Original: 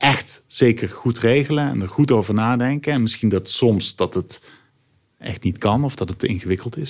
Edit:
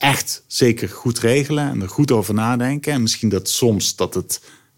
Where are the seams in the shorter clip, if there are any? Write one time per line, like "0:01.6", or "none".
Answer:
none